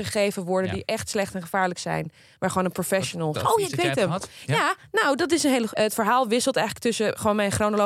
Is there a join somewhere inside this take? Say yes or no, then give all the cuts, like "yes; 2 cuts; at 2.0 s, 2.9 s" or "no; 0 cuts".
yes; 2 cuts; at 3.3 s, 5.7 s